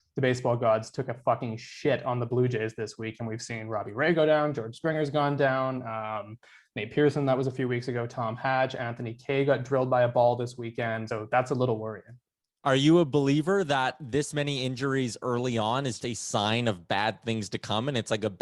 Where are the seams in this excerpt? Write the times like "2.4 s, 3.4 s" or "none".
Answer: 11.1 s, 16.0 s

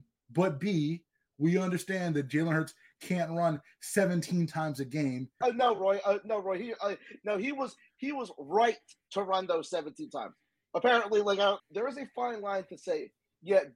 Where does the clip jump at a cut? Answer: 5.4 s, 11.6 s

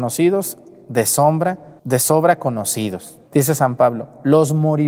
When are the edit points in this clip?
1.8 s, 3.3 s

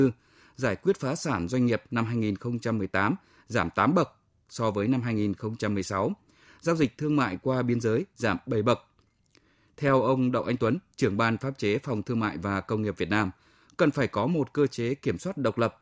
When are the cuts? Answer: none

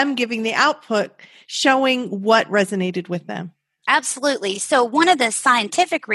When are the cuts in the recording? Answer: none

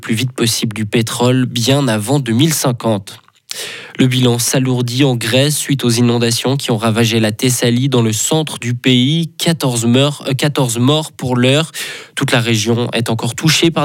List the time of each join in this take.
none

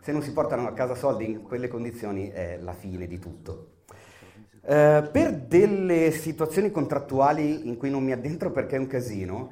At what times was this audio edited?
none

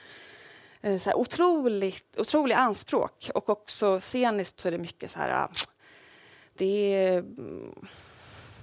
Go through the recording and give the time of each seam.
none

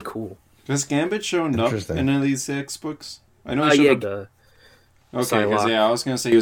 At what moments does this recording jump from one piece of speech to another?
4.0 s

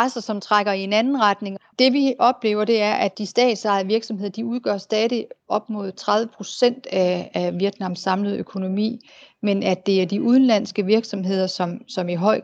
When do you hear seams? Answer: 1.7 s

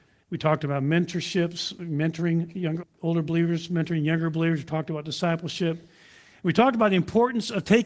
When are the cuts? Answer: 2.8 s

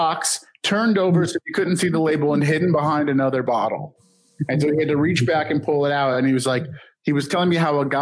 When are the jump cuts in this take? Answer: none

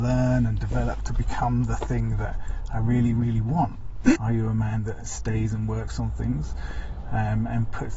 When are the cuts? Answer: 4.1 s

